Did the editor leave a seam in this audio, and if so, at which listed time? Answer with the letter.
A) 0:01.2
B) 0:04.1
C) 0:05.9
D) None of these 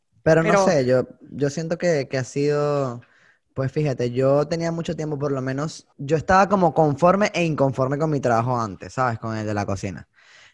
C